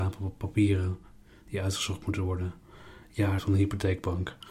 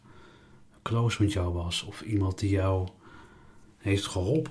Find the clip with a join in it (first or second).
first